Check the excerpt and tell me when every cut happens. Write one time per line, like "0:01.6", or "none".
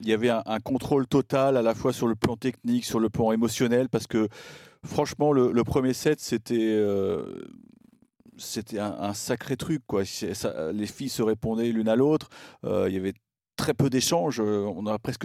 none